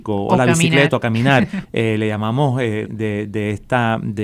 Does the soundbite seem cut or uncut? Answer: cut